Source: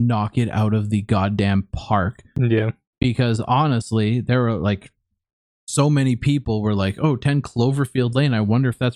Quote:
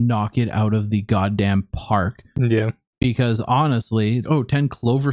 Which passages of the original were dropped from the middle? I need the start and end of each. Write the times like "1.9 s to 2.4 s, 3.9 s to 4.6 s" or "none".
4.2 s to 6.9 s